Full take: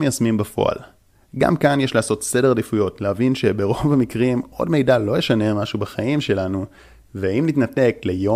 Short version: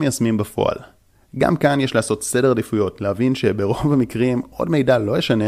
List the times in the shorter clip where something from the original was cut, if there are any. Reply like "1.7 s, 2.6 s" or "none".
none

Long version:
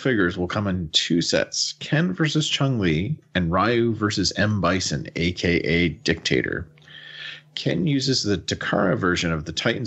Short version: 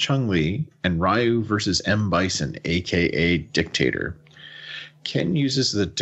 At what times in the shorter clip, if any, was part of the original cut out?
none

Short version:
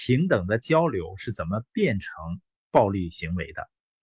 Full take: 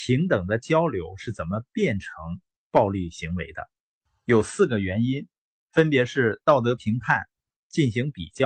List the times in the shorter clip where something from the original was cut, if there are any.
none

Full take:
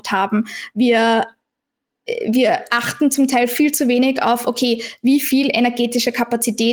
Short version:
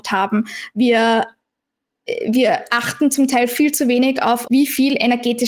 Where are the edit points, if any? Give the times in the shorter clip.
4.4 s

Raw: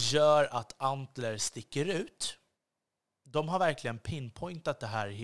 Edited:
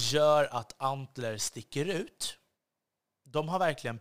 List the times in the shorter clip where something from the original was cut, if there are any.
none

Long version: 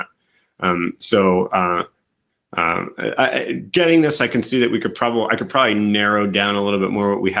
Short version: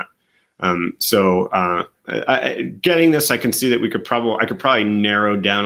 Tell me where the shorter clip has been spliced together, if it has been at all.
2.0 s

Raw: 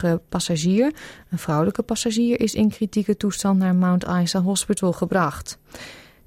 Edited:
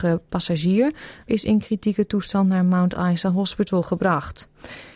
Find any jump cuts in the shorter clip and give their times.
1.3 s

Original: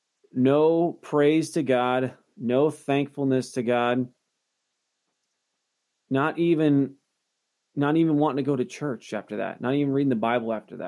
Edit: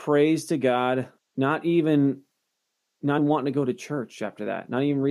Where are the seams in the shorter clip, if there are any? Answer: 1.2 s, 3.2 s

